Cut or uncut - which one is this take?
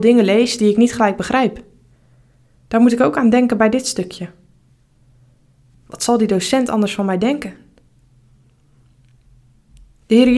cut